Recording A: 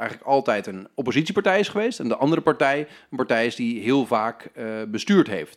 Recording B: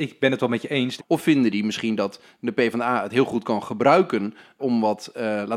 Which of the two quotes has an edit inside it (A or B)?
B